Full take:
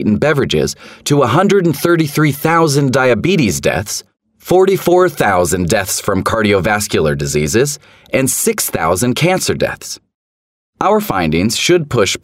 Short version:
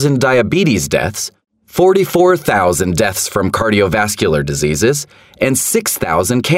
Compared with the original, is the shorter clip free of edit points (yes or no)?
yes